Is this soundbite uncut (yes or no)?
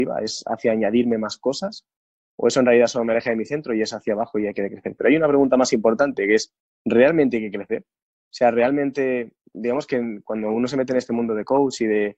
yes